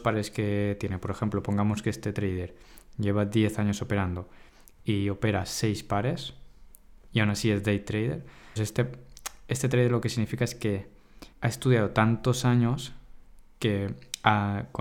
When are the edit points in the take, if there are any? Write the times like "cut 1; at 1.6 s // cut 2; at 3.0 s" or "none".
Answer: cut 1; at 8.6 s // cut 2; at 11.3 s

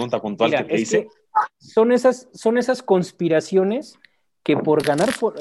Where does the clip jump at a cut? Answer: none

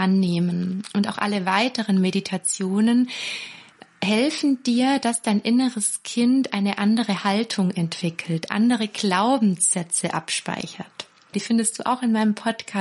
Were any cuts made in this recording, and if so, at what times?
cut 1; at 11.3 s

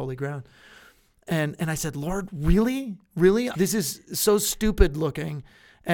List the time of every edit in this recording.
cut 1; at 3.5 s

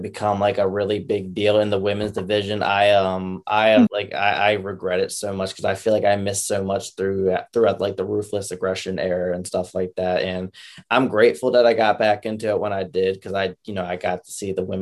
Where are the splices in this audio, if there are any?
cut 1; at 3.9 s

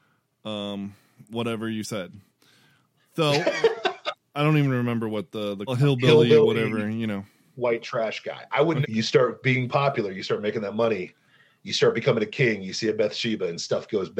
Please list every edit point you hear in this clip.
cut 1; at 5.7 s // cut 2; at 8.8 s

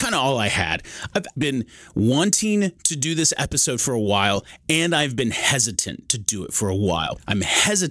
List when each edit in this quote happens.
cut 1; at 1.4 s

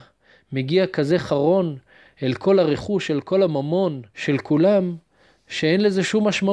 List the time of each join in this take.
cut 1; at 4.1 s

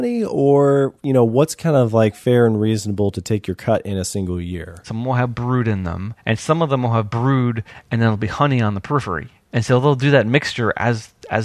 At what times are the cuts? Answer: cut 1; at 4.8 s

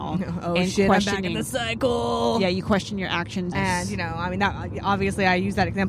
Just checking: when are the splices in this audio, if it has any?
cut 1; at 3.5 s

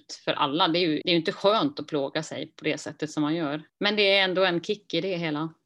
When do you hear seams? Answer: cut 1; at 1.0 s // cut 2; at 3.7 s

